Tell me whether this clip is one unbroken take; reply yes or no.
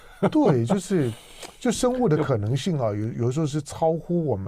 yes